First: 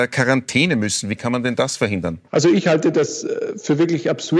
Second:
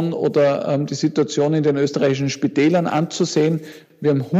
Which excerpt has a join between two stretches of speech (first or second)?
first